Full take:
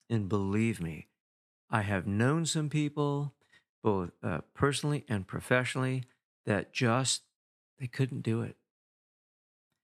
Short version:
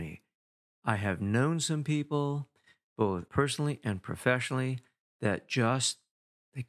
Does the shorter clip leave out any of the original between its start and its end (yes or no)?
yes